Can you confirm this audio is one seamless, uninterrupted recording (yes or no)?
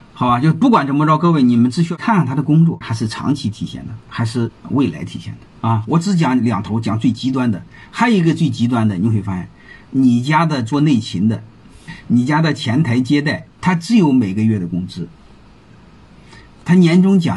no